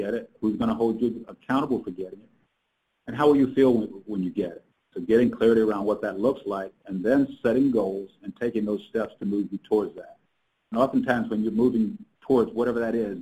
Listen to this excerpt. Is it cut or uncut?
uncut